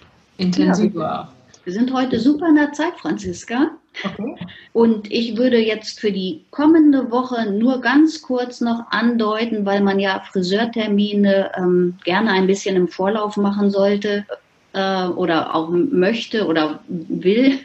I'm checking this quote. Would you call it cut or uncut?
cut